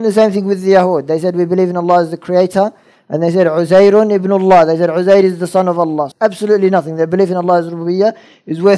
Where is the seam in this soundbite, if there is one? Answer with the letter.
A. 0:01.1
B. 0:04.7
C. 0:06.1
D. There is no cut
C